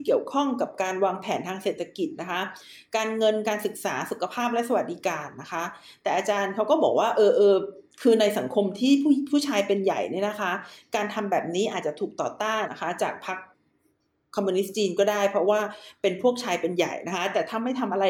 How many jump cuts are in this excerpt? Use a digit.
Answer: 1